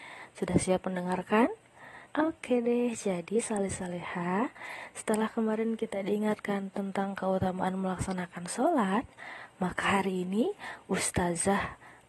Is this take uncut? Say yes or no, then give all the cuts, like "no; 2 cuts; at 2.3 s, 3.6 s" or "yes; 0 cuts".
no; 1 cut; at 2.1 s